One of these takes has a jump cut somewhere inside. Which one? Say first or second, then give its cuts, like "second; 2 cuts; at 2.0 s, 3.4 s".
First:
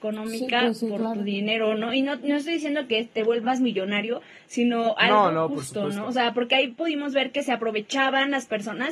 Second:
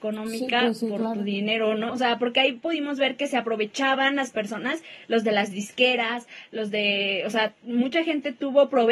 second; 1 cut; at 1.9 s